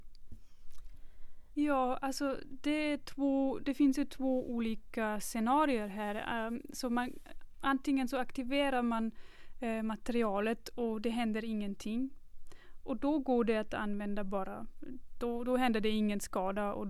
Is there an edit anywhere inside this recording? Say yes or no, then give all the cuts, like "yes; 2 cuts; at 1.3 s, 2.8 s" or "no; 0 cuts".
yes; 1 cut; at 1.5 s